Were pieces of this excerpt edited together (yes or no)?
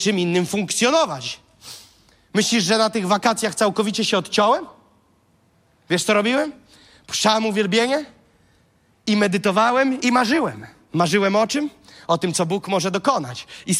no